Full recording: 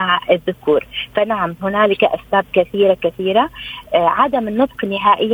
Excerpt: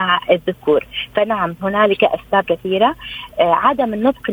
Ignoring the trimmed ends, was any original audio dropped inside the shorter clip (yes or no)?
yes